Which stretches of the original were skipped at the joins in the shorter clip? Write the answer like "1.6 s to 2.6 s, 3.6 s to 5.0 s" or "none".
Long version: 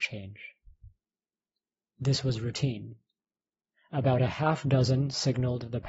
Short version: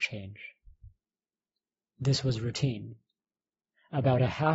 none